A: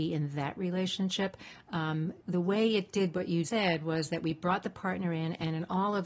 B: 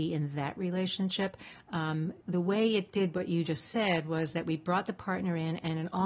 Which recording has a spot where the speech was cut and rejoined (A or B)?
A